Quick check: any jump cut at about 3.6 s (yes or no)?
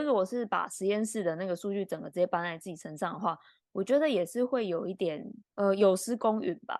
no